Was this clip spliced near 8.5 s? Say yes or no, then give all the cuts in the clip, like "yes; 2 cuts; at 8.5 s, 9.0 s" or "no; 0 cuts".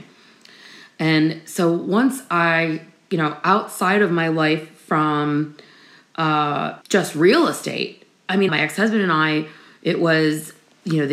yes; 2 cuts; at 6.8 s, 8.5 s